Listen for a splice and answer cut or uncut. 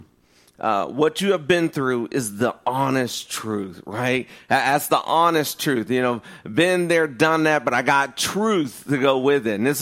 uncut